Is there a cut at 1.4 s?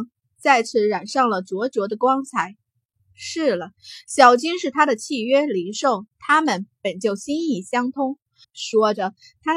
no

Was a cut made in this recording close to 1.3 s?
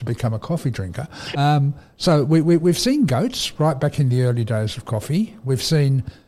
yes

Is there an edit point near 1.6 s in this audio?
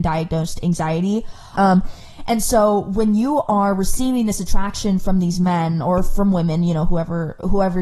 yes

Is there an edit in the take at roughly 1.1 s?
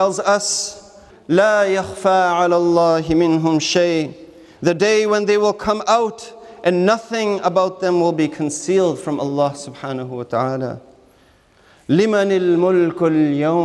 yes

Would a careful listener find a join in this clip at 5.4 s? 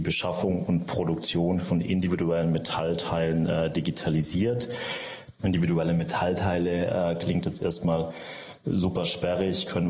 yes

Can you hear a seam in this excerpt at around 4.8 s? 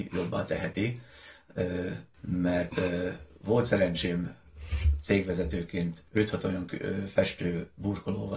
no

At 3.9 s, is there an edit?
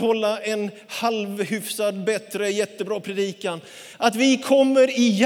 yes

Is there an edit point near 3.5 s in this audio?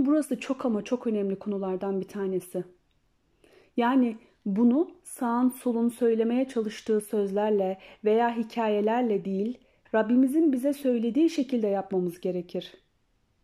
no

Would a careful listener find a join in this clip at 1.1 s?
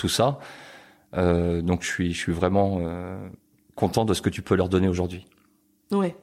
no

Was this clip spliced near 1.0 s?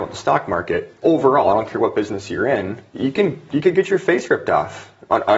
yes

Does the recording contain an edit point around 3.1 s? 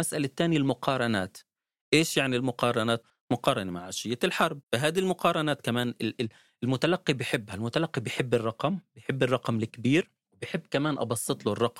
yes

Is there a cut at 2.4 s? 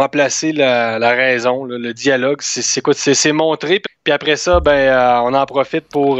no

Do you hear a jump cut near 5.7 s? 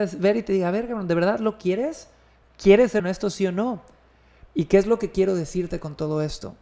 no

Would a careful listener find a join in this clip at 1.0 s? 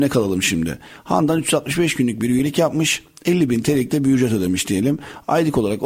no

